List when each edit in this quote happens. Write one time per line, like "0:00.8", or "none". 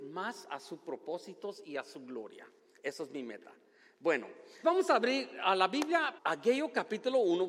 0:04.6
0:06.2